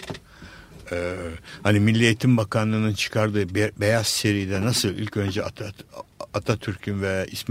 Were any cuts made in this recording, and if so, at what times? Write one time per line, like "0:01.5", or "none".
none